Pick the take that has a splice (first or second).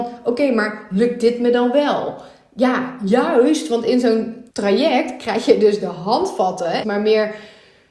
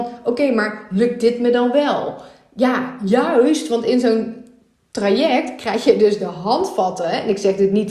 first